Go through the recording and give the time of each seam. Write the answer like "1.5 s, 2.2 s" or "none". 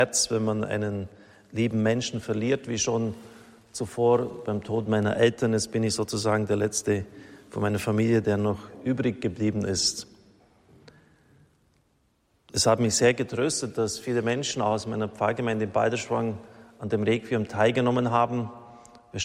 none